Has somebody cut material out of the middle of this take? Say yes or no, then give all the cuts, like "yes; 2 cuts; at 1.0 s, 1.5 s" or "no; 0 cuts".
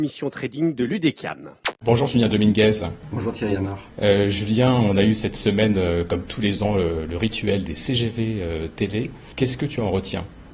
no; 0 cuts